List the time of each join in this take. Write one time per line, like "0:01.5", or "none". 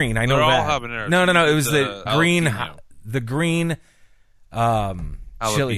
0:02.0